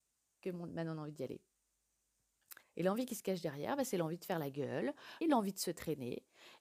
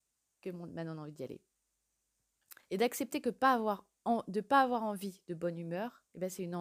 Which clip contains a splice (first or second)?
first